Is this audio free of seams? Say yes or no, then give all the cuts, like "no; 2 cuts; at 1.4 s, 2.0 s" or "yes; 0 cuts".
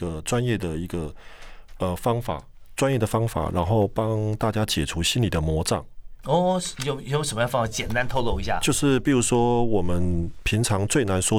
yes; 0 cuts